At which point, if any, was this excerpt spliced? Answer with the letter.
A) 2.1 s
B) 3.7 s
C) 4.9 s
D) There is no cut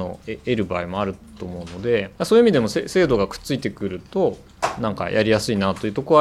A